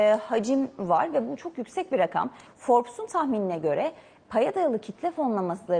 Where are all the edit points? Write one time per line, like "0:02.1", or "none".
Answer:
0:02.5